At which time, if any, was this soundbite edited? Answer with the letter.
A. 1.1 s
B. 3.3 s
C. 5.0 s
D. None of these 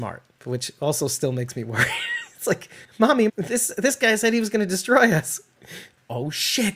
B